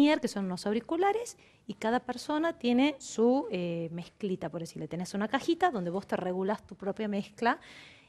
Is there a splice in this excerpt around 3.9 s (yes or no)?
no